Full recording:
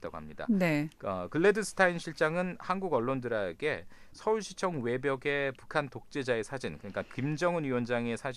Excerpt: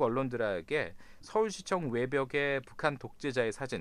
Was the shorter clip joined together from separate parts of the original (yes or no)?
no